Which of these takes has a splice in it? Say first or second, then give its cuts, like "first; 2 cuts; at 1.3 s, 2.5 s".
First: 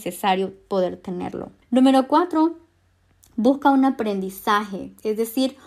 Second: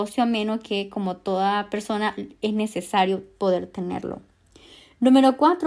first; 1 cut; at 1.6 s